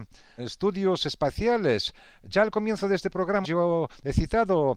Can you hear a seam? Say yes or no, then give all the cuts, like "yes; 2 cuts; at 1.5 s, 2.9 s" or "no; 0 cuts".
yes; 1 cut; at 3.4 s